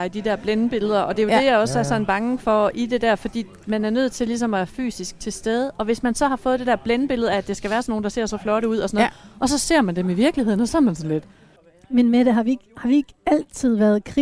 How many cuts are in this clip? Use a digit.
0